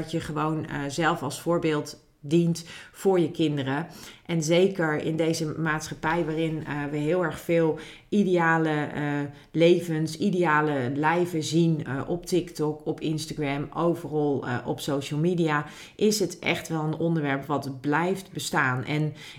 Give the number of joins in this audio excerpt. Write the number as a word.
zero